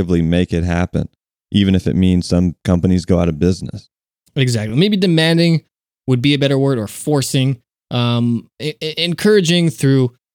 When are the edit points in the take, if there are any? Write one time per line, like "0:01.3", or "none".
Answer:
none